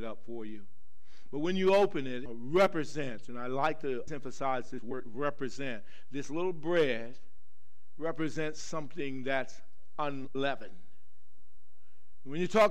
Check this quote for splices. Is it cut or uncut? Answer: cut